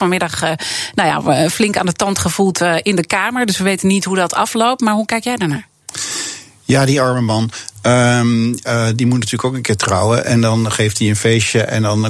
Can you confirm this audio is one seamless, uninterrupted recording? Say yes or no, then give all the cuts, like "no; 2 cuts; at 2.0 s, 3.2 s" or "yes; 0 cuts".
yes; 0 cuts